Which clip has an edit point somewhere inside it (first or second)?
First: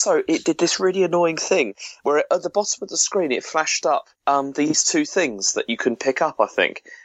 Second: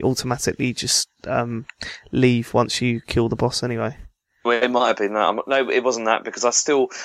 first